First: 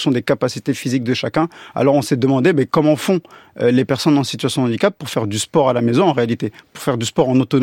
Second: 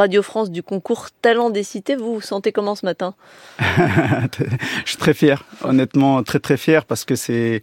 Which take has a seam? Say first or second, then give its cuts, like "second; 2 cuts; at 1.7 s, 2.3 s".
second; 1 cut; at 5.0 s